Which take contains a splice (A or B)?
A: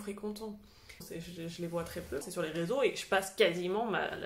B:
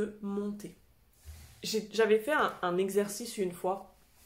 A